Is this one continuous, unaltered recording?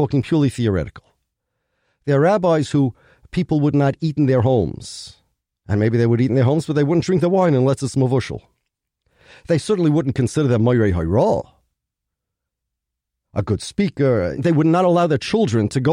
no; 1 cut; at 14.4 s

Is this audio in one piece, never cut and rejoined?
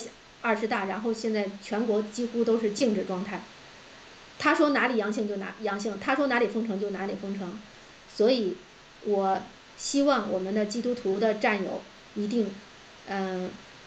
yes; 0 cuts

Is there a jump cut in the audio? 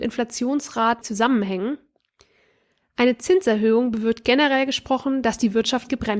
yes; 1 cut; at 1.0 s

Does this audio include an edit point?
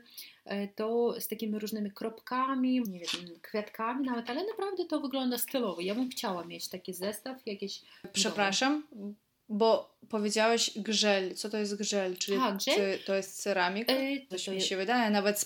yes; 2 cuts; at 2.8 s, 14.3 s

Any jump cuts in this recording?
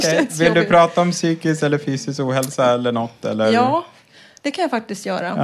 no; 0 cuts

